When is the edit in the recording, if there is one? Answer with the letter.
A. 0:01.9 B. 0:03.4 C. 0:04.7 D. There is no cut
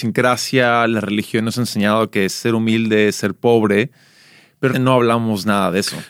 C